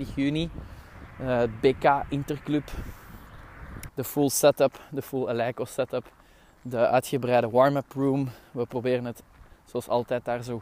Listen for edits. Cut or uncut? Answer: cut